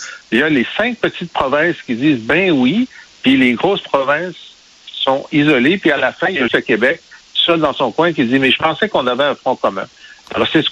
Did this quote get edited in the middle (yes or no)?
yes